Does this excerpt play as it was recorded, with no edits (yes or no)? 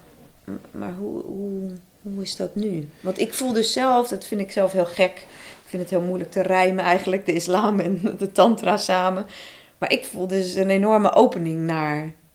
yes